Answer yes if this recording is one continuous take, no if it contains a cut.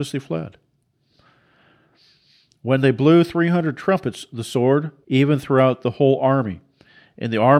no